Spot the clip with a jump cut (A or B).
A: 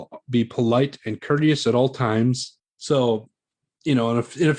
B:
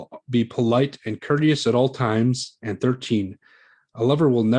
A